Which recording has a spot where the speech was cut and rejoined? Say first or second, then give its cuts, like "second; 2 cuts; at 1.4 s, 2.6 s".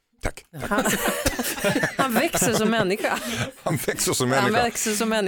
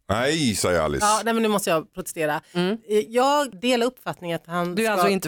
second; 1 cut; at 3.5 s